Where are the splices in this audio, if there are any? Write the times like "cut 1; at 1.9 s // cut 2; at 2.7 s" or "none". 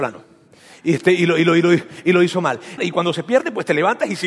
cut 1; at 2.8 s